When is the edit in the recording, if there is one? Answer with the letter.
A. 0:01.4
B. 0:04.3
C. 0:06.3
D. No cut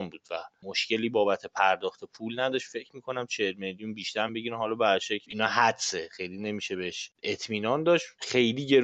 B